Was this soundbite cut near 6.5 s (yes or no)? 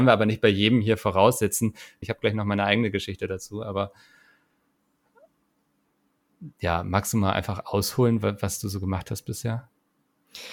yes